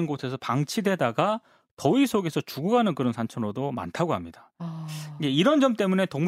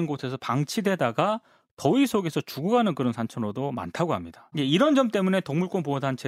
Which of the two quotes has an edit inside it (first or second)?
second